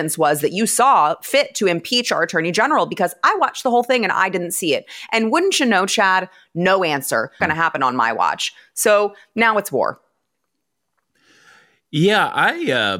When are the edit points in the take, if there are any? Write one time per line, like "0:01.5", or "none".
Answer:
0:07.4